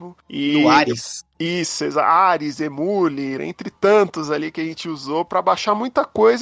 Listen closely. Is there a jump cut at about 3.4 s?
yes; 1 cut; at 3.4 s

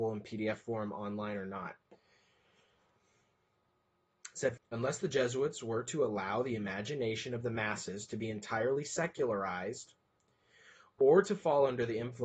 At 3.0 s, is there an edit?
yes; 2 cuts; at 3.0 s, 4.6 s

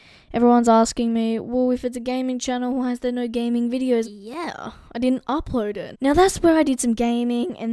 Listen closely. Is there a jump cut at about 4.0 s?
yes; 2 cuts; at 4.0 s, 5.9 s

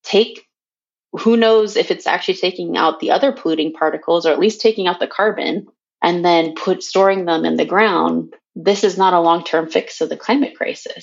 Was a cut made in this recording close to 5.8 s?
yes; 2 cuts; at 5.8 s, 8.4 s

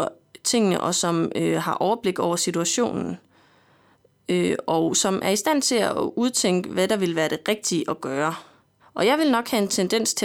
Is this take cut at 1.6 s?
no; 1 cut; at 8.8 s

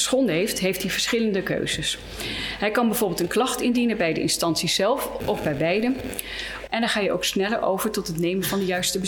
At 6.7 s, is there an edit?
yes; 2 cuts; at 5.2 s, 6.7 s

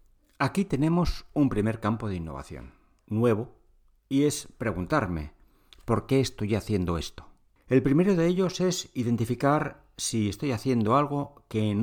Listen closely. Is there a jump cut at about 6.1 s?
no; 2 cuts; at 3.0 s, 7.6 s

